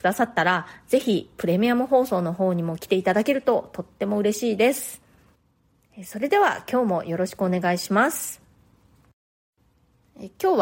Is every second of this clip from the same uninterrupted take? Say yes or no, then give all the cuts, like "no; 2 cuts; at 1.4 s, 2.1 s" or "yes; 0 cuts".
yes; 0 cuts